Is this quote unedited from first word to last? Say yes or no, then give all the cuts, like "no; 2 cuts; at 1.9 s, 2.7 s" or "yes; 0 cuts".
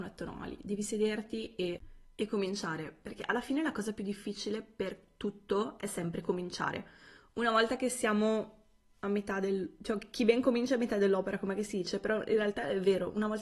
yes; 0 cuts